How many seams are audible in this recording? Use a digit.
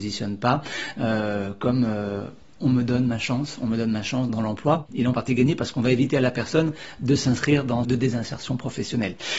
2